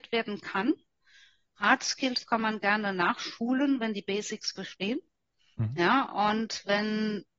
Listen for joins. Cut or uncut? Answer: uncut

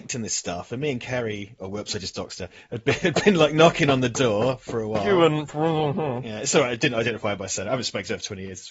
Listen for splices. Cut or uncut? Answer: uncut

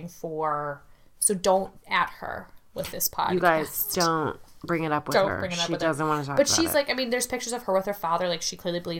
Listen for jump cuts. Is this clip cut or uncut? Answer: uncut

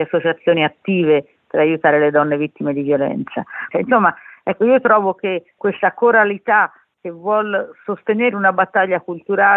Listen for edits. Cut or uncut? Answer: cut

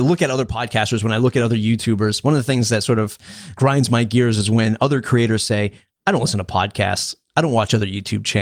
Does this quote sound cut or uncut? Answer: uncut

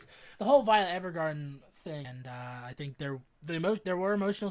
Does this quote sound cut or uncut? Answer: cut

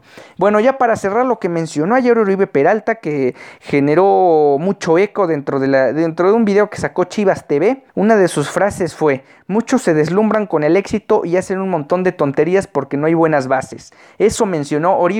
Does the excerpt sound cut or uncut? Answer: cut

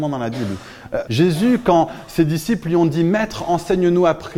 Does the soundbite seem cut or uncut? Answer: cut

